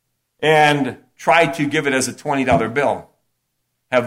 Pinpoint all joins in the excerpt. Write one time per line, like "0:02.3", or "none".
none

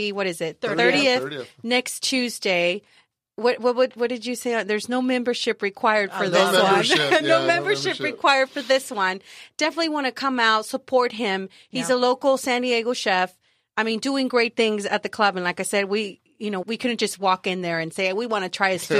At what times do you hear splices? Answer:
0:16.6

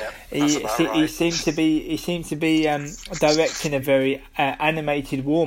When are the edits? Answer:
0:03.8

